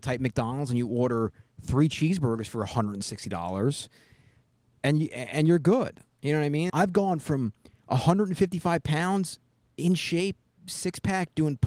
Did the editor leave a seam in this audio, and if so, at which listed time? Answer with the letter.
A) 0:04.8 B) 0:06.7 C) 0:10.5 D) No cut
B